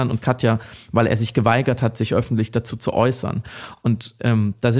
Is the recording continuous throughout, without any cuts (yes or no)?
yes